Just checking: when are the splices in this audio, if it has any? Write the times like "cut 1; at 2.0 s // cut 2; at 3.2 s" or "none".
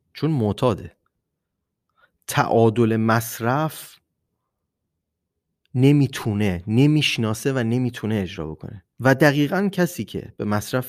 cut 1; at 8.9 s